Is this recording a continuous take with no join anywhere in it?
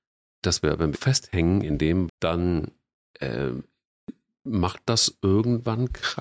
no; 2 cuts; at 0.9 s, 2.1 s

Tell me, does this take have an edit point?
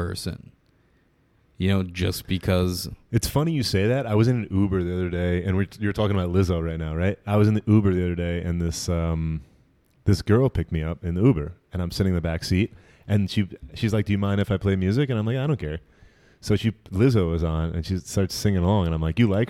no; 0 cuts

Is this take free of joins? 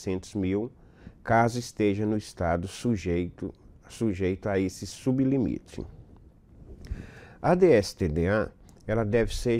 yes; 0 cuts

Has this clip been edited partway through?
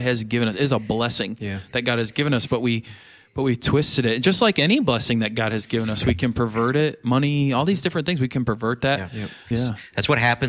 yes; 1 cut; at 9.5 s

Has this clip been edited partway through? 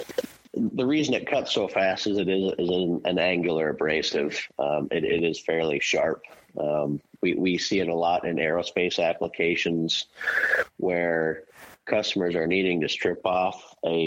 no; 0 cuts

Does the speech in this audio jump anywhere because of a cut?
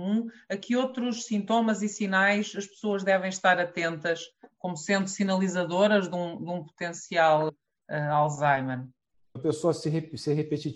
yes; 2 cuts; at 7.5 s, 9.4 s

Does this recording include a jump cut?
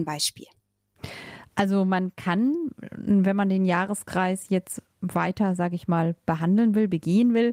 no; 0 cuts

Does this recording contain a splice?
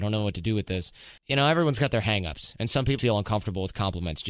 yes; 2 cuts; at 1.2 s, 3.0 s

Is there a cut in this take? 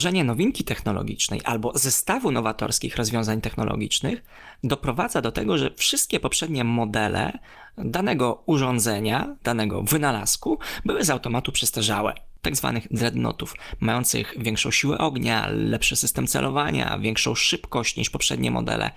yes; 1 cut; at 12.4 s

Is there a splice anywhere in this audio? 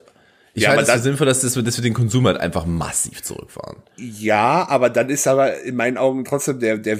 no; 0 cuts

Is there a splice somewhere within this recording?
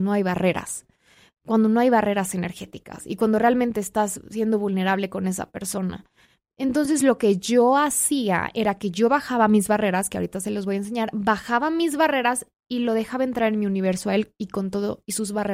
no; 0 cuts

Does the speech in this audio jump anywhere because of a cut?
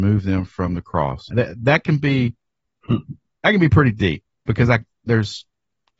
yes; 1 cut; at 1.3 s

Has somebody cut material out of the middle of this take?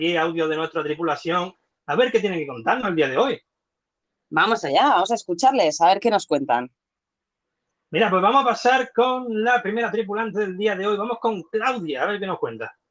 no; 0 cuts

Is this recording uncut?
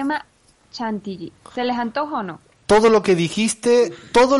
yes; 0 cuts

